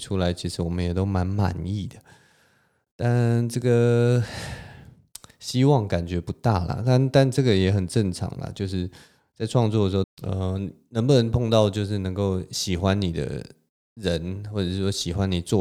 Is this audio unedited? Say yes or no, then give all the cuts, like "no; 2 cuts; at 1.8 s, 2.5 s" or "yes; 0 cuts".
no; 1 cut; at 10.0 s